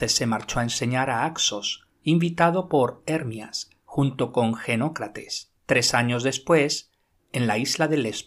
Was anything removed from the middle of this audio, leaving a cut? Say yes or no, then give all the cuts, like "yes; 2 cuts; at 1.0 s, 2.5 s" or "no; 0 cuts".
yes; 2 cuts; at 5.6 s, 7.2 s